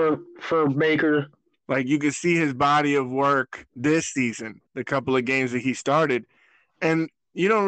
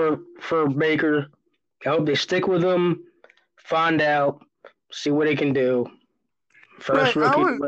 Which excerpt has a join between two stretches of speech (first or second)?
first